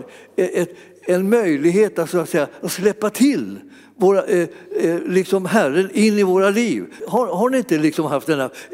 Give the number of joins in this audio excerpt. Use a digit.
1